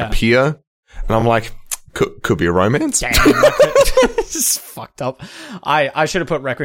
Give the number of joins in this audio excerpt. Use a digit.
0